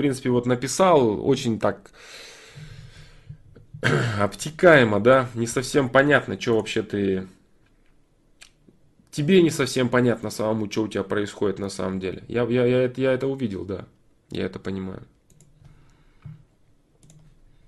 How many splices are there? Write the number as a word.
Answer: zero